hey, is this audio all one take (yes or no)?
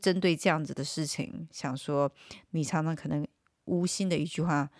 yes